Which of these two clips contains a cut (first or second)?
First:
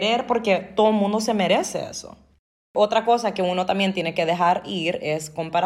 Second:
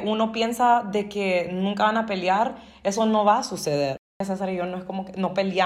second